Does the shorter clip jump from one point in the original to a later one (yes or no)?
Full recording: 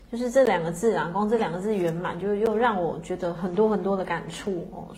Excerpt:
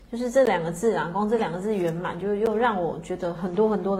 no